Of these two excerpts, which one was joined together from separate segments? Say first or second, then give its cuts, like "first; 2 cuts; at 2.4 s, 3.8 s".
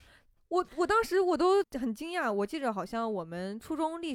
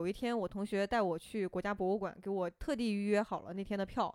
first; 1 cut; at 1.6 s